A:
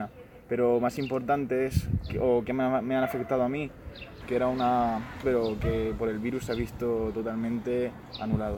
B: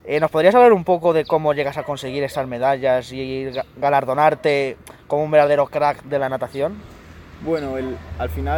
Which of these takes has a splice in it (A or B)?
A